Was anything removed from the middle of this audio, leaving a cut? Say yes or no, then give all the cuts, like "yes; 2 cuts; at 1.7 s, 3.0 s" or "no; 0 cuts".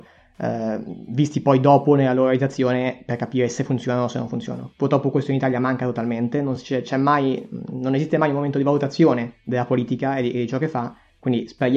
no; 0 cuts